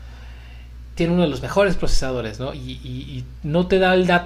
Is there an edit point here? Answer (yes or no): no